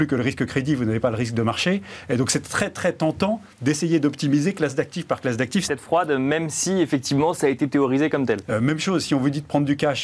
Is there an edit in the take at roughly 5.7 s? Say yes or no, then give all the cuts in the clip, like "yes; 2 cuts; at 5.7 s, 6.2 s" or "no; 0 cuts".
yes; 2 cuts; at 5.7 s, 8.4 s